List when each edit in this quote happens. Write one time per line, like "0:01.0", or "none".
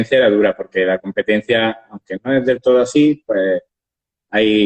none